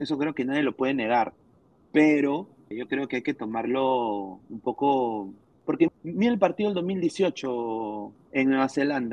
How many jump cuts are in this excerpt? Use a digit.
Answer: 3